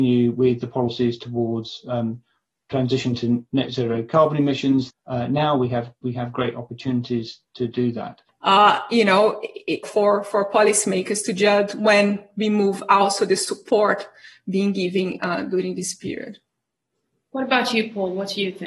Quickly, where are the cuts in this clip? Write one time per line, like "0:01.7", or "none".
0:04.9
0:08.3
0:09.8